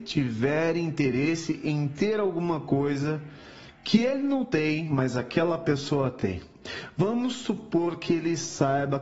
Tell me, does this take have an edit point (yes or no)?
no